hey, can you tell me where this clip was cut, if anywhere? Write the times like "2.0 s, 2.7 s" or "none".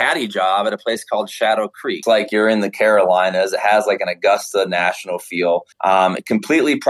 5.7 s